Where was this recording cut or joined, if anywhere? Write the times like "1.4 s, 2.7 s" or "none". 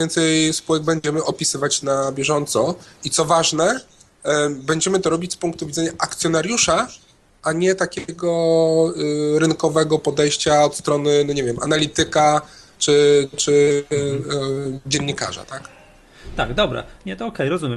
none